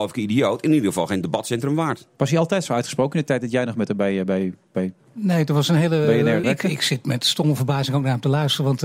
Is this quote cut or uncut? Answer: cut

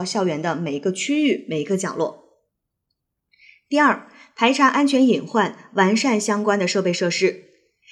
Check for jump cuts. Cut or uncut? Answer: uncut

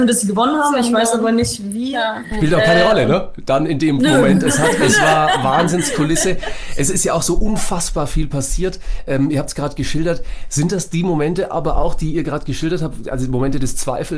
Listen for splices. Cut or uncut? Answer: uncut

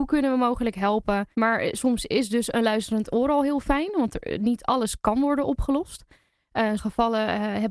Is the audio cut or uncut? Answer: cut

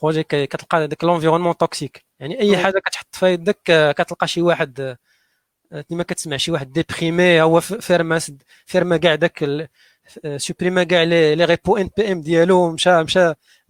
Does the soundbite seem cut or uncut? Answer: cut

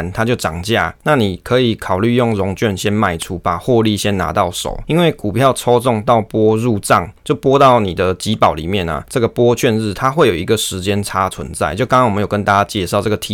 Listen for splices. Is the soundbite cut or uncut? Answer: uncut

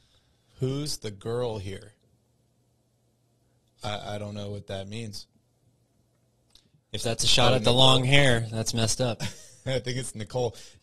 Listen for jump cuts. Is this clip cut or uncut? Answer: uncut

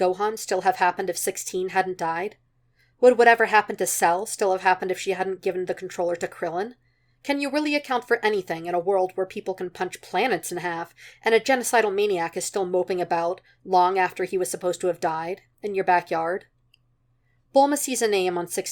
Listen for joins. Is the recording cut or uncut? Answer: uncut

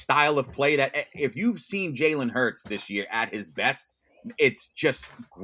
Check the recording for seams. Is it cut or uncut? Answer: uncut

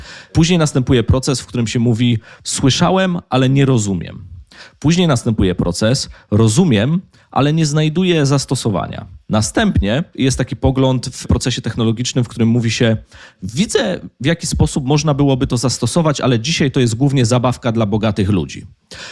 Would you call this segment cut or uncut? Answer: uncut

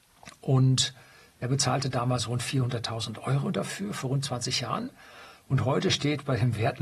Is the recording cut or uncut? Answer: uncut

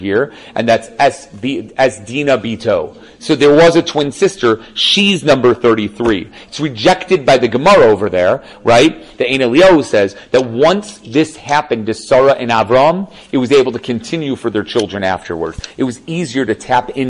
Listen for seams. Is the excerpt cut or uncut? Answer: cut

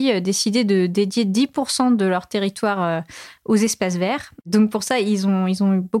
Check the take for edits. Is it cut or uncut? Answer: cut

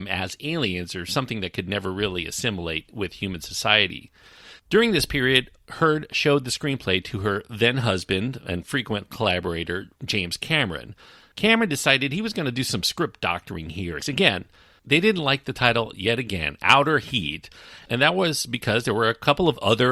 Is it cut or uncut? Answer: cut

